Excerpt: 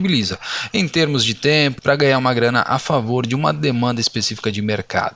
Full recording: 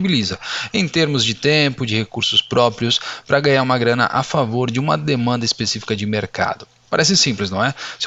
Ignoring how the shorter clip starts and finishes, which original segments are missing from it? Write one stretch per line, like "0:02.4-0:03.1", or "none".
0:01.8-0:03.2